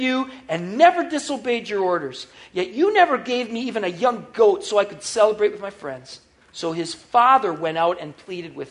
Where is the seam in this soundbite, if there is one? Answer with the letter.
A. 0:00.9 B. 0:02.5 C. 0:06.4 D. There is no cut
C